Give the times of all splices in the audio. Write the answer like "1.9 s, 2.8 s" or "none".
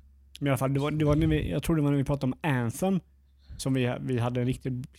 none

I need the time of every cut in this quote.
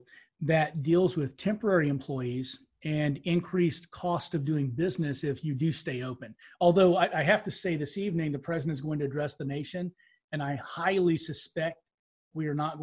none

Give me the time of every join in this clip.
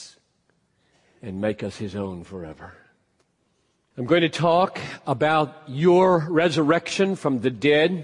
3.9 s

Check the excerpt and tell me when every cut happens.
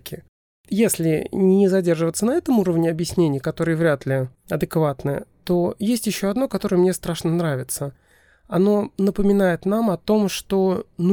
none

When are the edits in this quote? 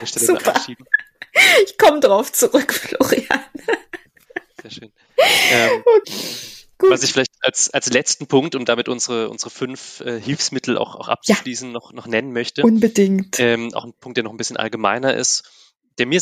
6.0 s

